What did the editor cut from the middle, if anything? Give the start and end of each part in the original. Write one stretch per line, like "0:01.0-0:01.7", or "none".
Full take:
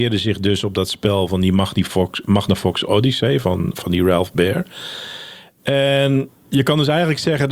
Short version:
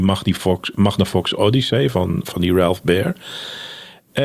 none